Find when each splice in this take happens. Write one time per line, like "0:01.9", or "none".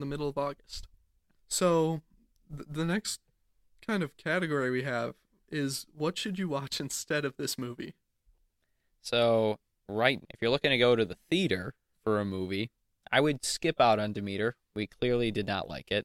0:01.3
0:10.2